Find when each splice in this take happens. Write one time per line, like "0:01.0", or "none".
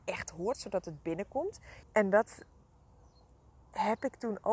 0:01.8